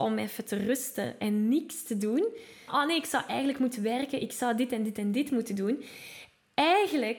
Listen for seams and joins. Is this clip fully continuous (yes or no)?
no